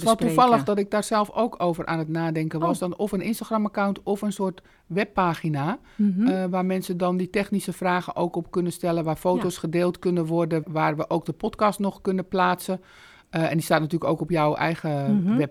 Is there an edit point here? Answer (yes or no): yes